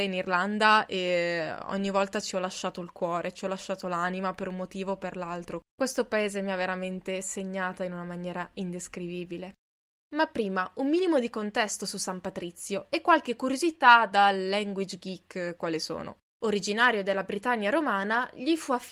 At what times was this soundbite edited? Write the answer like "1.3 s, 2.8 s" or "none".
16.4 s

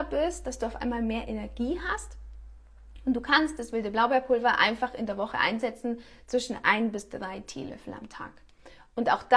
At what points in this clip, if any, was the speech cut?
none

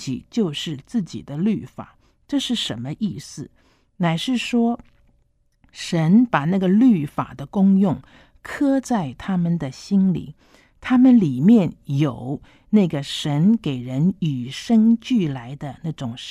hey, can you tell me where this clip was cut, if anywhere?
none

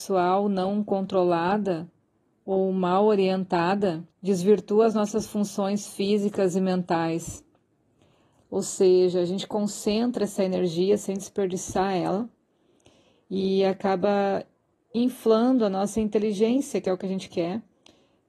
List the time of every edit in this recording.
4.1 s, 8.4 s

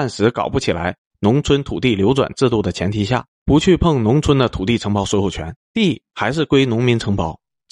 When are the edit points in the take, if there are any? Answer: 3.3 s, 5.6 s

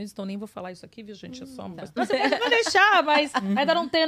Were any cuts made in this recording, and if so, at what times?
1.9 s

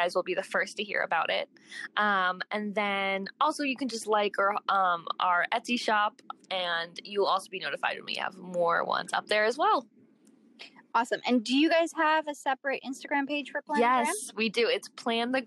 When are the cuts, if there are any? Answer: none

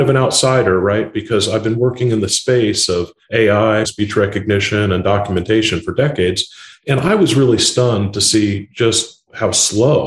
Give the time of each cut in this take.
3.8 s, 6.7 s

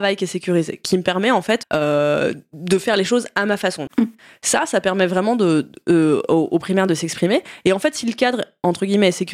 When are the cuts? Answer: 1.6 s, 3.9 s

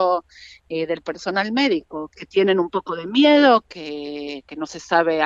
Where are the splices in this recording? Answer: 2.1 s, 3.6 s

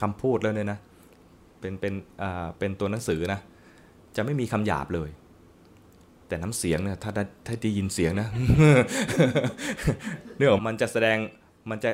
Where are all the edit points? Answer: 10.6 s

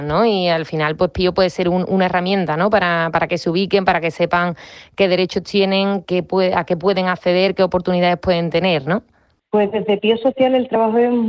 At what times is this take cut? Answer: 6.0 s, 9.4 s

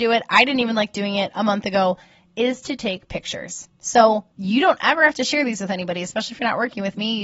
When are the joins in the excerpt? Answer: 4.3 s

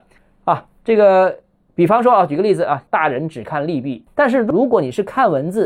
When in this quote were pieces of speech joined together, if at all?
2.9 s, 4.1 s

